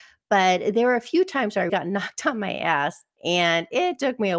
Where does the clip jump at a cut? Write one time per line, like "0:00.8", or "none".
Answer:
0:01.7